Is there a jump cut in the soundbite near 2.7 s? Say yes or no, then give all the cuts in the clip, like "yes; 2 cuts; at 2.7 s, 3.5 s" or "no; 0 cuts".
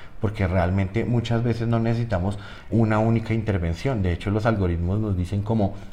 yes; 1 cut; at 2.7 s